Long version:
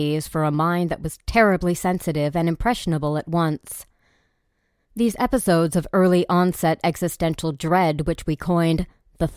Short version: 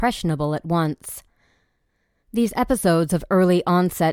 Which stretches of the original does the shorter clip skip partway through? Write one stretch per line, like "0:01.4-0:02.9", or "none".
none